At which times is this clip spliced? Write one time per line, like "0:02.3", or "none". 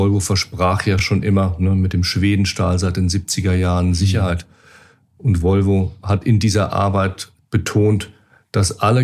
none